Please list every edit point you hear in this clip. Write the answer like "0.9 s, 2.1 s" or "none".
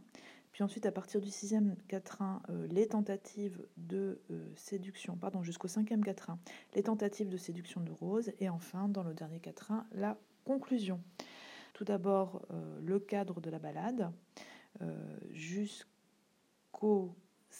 11.7 s